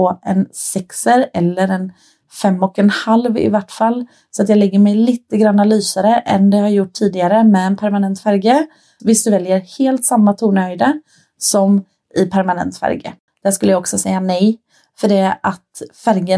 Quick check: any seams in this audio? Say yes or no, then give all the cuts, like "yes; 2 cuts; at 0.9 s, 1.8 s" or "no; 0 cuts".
yes; 2 cuts; at 9.0 s, 13.3 s